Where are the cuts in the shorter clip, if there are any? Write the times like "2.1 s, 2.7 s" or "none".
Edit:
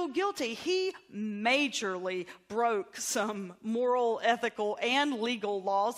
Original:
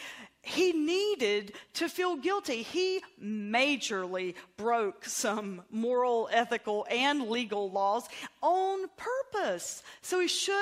none

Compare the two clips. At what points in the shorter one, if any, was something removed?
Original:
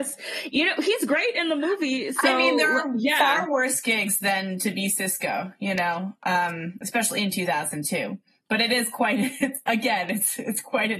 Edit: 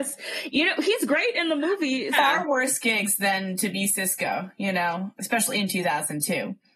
2.1 s, 5.2 s

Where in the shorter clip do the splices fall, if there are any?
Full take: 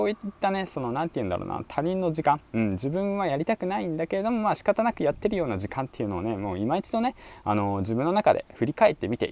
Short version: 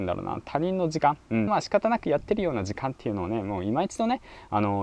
1.5 s

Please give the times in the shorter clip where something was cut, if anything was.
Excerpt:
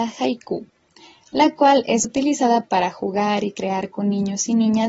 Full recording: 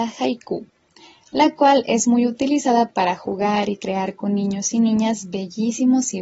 2.0 s

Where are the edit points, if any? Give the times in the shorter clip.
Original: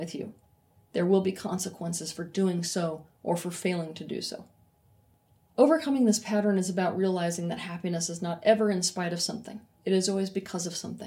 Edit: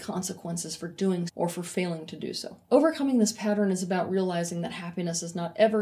1.3 s, 2.6 s

